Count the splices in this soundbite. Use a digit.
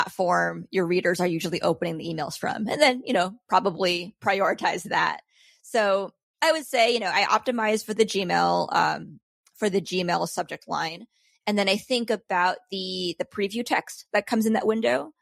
0